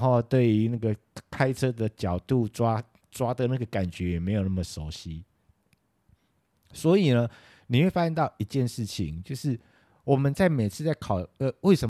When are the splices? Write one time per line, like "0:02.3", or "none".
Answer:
none